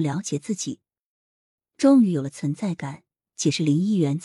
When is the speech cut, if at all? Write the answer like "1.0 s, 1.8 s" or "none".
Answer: 3.3 s